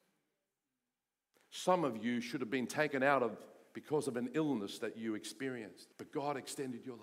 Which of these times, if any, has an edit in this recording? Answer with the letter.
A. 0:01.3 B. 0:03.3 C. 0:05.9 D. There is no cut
C